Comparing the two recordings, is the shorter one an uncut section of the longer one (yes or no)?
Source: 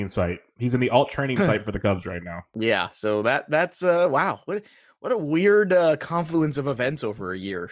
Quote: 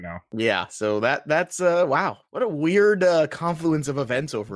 no